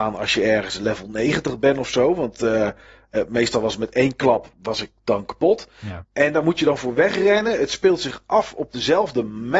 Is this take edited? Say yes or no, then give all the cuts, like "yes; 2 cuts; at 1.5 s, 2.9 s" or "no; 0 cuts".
no; 0 cuts